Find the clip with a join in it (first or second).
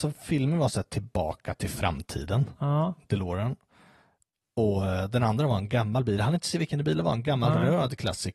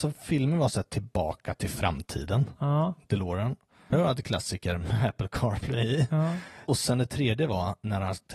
second